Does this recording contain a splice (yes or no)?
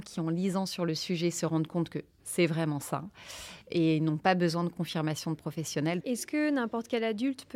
yes